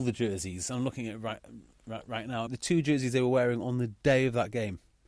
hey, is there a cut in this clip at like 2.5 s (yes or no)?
yes